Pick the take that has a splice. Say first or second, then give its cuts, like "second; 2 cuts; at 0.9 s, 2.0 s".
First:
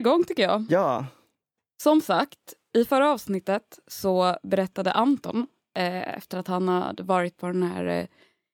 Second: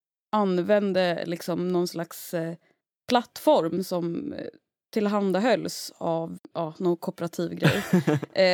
second; 1 cut; at 6.4 s